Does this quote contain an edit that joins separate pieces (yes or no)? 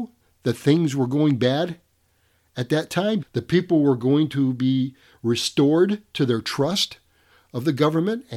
yes